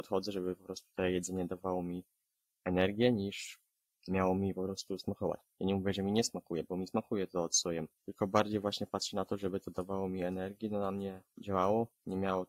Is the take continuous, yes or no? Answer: yes